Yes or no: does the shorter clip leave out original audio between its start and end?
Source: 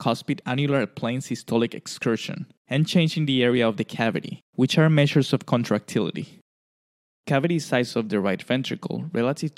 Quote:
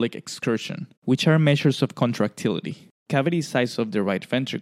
yes